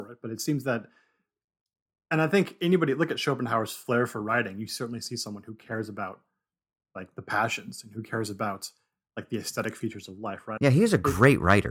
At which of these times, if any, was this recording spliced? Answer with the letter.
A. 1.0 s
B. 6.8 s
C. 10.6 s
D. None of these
C